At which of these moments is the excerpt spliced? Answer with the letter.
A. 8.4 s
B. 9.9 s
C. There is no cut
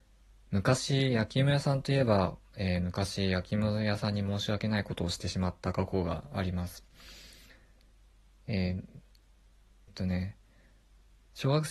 B